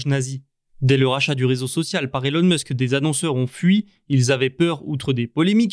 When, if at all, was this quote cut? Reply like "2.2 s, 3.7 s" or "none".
none